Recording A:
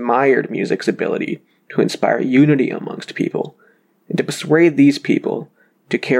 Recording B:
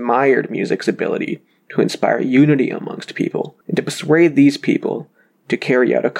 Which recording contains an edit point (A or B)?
B